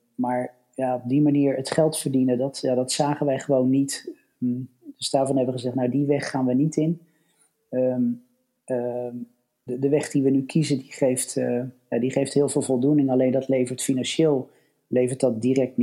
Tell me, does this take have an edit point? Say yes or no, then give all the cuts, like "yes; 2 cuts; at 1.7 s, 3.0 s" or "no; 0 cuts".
yes; 1 cut; at 9.7 s